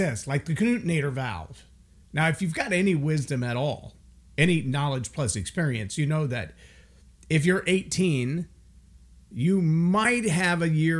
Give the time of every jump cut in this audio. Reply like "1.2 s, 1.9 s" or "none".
2.0 s